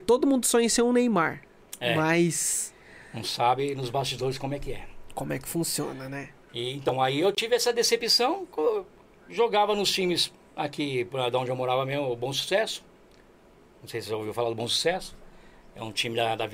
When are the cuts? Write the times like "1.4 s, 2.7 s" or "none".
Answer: none